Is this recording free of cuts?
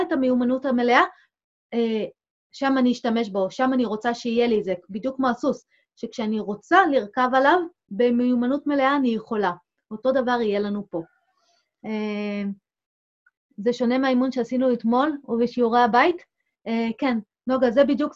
yes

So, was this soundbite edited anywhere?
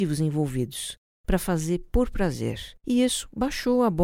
yes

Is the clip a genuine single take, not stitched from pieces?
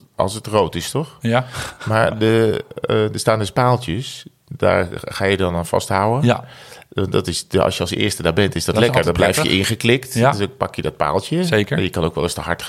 yes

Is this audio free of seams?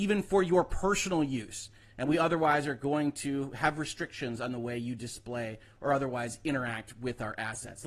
yes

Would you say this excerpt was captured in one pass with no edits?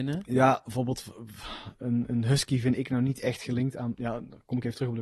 yes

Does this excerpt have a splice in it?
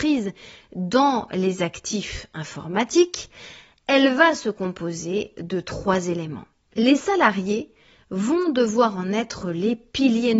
yes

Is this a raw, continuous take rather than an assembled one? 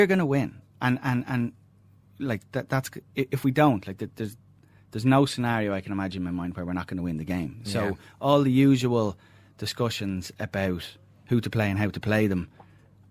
yes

